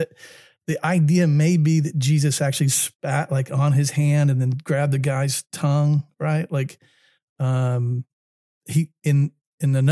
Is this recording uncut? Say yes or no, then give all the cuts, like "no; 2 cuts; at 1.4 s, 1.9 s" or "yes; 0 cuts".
yes; 0 cuts